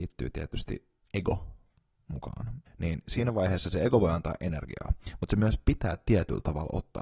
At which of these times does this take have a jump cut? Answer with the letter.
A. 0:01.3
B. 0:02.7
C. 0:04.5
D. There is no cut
B